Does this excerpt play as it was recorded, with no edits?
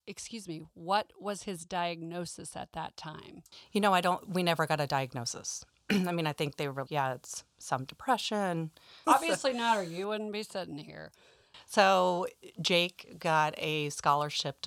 no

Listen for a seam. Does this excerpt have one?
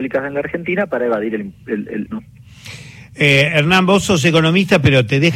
yes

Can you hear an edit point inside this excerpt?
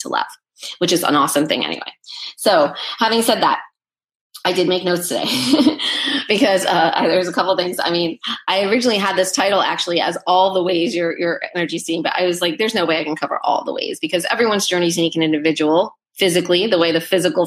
no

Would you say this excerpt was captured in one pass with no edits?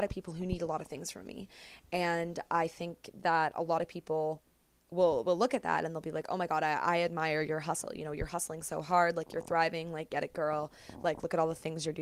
yes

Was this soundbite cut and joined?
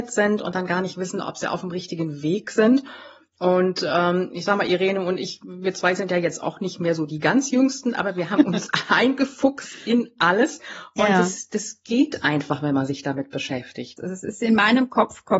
yes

